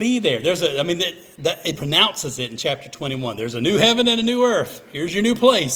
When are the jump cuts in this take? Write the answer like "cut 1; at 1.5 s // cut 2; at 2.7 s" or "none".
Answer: cut 1; at 1.7 s